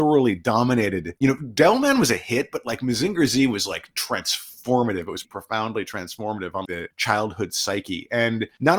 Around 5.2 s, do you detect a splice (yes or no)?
yes